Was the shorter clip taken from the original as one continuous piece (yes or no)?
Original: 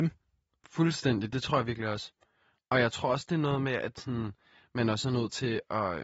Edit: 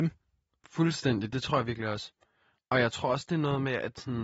yes